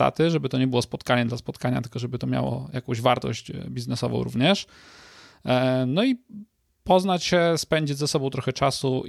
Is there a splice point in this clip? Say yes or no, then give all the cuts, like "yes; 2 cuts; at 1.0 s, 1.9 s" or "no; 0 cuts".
no; 0 cuts